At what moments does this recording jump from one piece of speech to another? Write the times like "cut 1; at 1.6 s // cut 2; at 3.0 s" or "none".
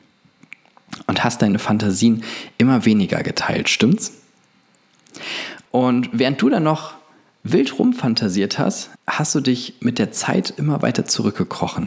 cut 1; at 5.7 s // cut 2; at 9.0 s